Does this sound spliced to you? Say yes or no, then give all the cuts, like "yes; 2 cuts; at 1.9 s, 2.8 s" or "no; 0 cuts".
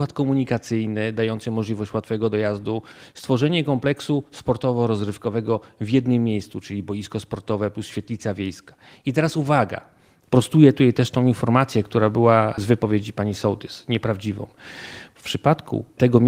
no; 0 cuts